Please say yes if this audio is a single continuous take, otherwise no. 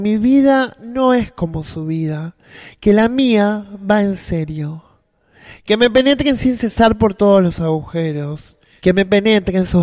yes